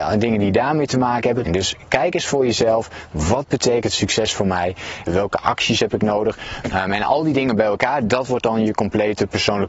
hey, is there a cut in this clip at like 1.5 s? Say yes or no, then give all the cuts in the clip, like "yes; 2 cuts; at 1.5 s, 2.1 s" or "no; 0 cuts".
yes; 3 cuts; at 1.5 s, 5.1 s, 6.6 s